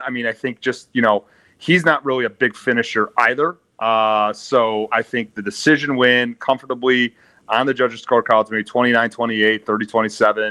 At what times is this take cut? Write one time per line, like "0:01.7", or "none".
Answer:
0:04.9